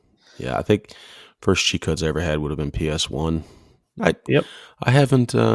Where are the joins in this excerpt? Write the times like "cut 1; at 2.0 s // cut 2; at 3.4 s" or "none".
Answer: cut 1; at 4.0 s